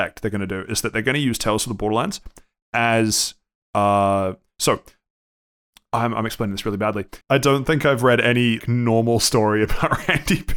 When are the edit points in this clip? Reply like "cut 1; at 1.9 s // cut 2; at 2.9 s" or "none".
cut 1; at 7.2 s // cut 2; at 8.6 s